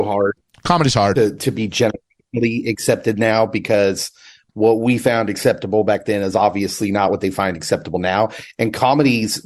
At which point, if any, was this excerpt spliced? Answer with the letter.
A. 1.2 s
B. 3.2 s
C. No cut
C